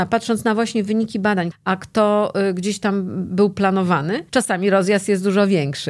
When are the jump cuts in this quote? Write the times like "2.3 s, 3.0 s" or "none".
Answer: 1.5 s, 4.3 s